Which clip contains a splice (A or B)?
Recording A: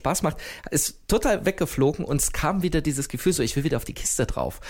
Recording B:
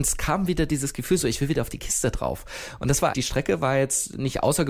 B